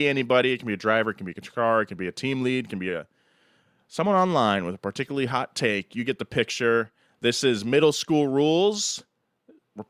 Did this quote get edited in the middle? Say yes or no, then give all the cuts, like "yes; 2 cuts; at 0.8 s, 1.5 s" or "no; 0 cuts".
no; 0 cuts